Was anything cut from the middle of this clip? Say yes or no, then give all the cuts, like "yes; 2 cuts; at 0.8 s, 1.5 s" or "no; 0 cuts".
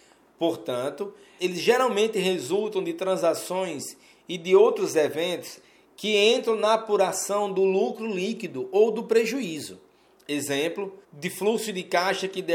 yes; 2 cuts; at 1.4 s, 11.0 s